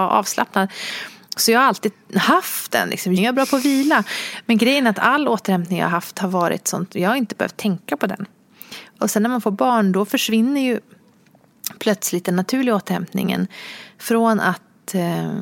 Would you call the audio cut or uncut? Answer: cut